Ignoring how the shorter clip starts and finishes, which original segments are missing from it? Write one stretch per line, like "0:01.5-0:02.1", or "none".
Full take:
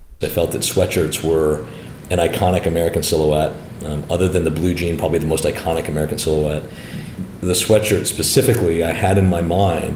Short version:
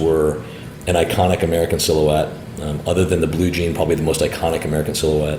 none